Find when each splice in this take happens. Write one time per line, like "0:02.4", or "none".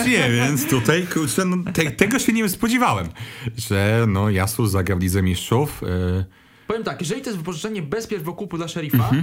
none